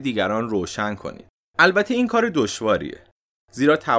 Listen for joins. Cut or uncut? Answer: uncut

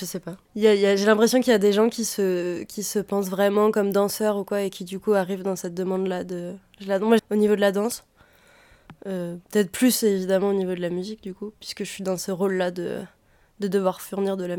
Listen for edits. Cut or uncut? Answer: cut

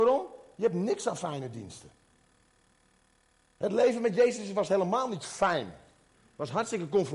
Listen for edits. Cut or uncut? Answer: uncut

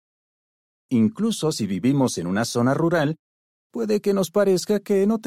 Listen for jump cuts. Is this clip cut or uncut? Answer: uncut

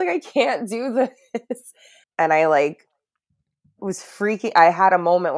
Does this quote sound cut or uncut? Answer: cut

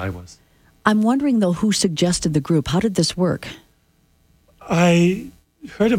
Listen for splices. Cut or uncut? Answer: uncut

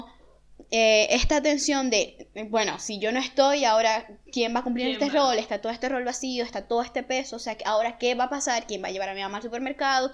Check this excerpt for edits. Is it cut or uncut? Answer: uncut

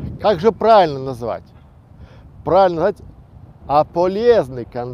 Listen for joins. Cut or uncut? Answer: cut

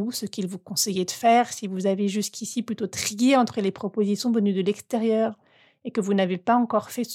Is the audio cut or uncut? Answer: uncut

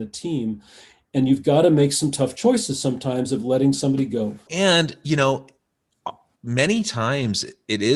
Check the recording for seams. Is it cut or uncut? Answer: cut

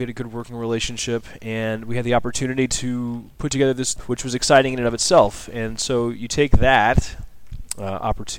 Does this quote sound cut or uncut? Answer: cut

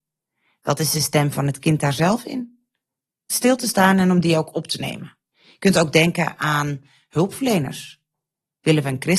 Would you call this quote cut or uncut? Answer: cut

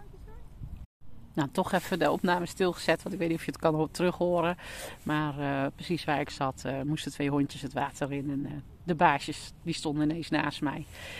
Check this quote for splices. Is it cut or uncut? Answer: uncut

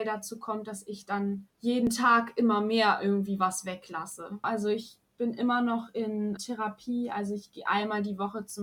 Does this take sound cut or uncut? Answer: cut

